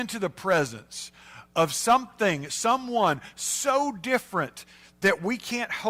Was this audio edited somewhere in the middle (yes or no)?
no